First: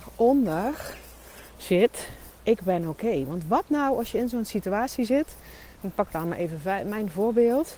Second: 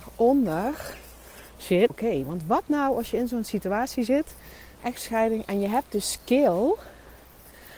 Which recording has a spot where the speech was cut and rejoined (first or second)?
second